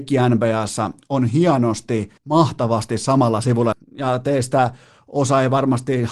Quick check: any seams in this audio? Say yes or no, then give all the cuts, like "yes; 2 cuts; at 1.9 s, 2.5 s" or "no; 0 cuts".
yes; 2 cuts; at 2.2 s, 3.7 s